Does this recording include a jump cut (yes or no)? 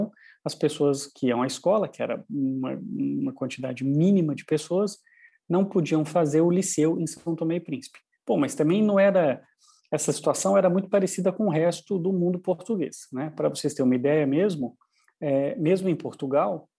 no